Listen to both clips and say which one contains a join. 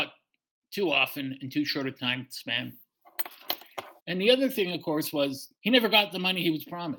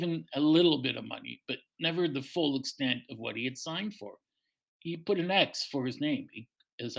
first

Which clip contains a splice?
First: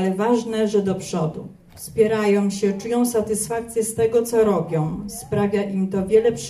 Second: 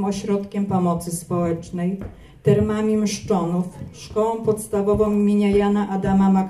first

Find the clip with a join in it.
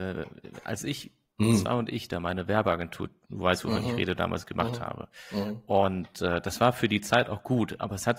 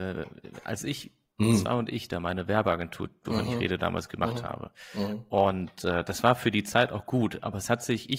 second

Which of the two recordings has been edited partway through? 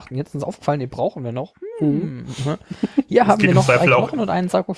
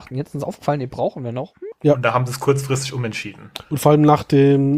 second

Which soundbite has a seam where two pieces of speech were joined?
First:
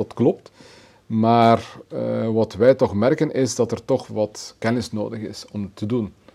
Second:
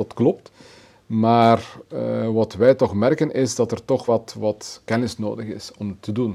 first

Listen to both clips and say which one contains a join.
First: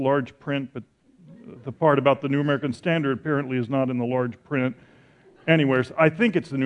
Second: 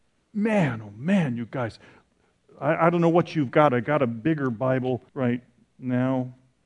second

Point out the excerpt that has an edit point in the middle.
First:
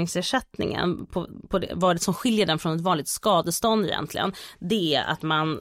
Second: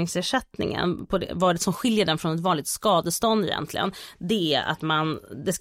second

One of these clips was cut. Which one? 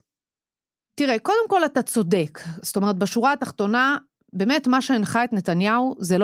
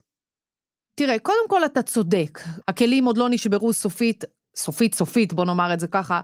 second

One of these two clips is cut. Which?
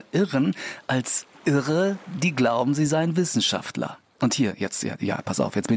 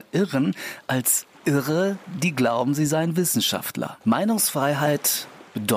second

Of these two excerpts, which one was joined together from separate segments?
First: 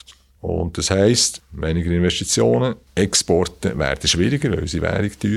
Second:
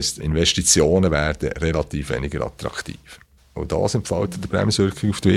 second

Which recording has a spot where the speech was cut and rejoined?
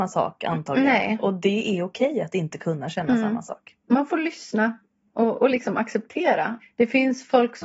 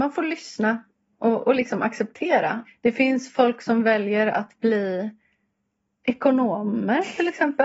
first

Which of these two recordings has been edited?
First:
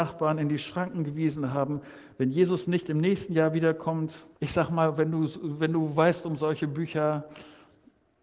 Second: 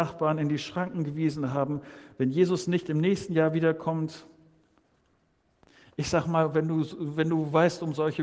first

